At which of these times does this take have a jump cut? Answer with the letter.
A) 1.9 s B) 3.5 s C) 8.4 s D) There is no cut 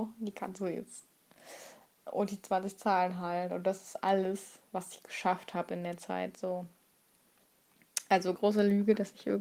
C